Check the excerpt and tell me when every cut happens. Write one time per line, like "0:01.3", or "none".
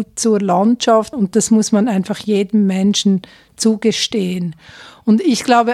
0:01.1